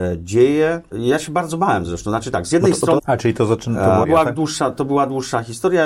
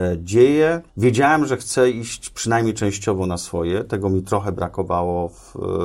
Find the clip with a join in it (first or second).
first